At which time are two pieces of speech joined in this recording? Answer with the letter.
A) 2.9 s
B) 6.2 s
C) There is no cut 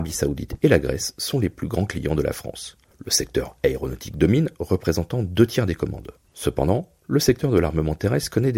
B